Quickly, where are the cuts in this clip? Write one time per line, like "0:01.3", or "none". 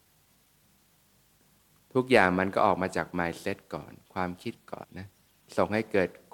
0:04.8

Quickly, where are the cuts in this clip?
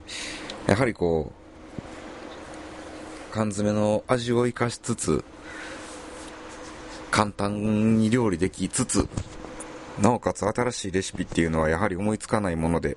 0:03.3

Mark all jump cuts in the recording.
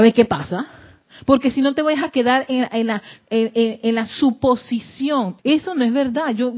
0:05.4

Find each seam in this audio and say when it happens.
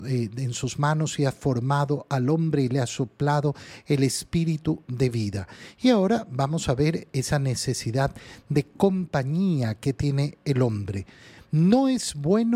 none

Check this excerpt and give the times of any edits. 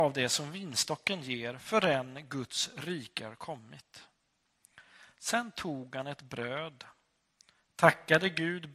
none

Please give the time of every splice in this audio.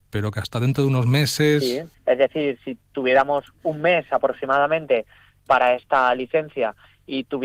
0:01.9

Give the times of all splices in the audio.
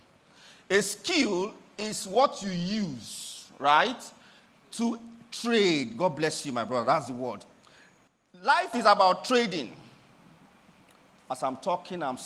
none

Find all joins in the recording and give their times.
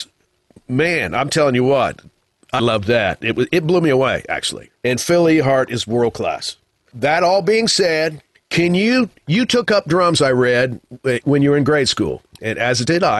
0:02.6
0:04.7

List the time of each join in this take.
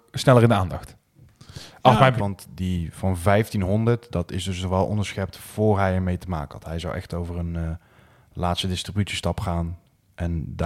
0:02.2

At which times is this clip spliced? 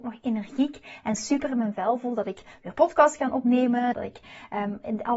0:03.9

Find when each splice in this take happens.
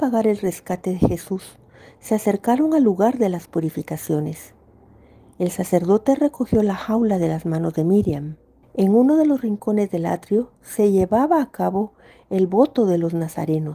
0:08.6

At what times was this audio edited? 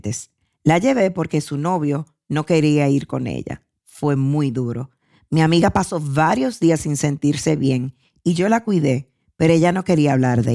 none

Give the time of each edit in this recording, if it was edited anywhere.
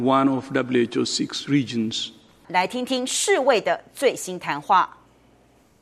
0:02.4

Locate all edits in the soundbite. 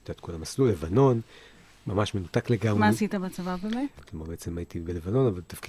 0:04.0

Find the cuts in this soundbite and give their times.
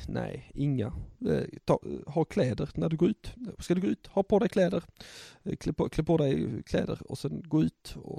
none

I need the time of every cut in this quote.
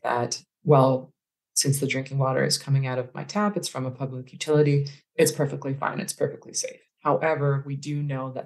none

